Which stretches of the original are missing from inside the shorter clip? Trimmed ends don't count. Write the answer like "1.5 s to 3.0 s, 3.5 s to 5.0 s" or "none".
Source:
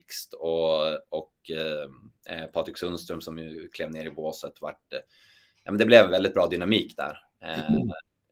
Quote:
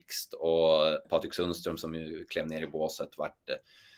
1.0 s to 2.5 s